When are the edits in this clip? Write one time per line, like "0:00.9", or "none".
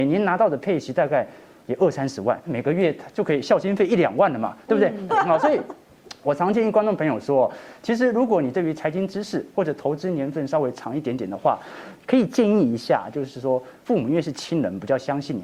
0:02.5
0:05.1